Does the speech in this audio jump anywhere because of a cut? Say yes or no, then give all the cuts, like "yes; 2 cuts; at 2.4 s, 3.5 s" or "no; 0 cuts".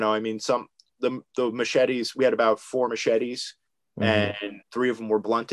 yes; 1 cut; at 4.6 s